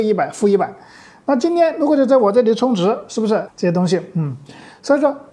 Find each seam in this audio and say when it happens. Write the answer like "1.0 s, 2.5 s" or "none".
3.5 s